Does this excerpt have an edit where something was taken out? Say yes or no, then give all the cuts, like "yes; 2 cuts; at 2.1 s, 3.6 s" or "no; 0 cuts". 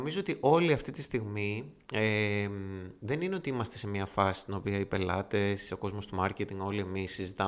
no; 0 cuts